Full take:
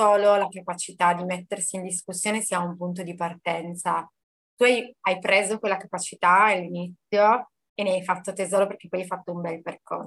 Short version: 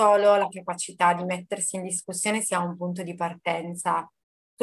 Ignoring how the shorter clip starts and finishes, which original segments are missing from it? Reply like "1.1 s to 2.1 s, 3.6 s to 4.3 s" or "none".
none